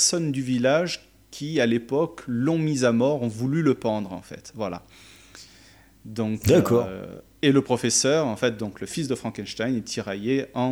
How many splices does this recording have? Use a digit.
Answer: 0